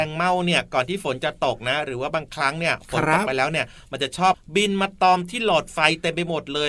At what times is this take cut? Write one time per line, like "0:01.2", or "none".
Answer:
0:04.3